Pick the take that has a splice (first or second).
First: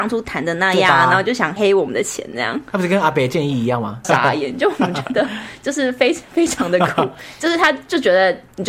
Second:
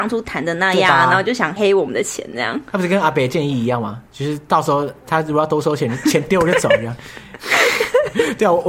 first